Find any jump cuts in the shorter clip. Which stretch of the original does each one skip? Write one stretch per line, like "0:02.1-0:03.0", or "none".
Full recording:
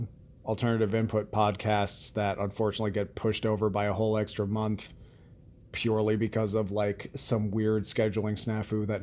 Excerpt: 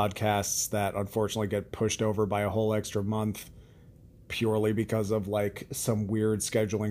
none